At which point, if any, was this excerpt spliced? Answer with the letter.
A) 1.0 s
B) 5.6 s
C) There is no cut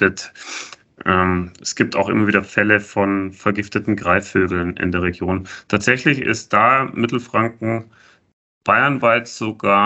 C